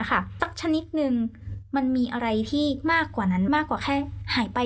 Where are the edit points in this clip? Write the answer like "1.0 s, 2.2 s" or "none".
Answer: 3.5 s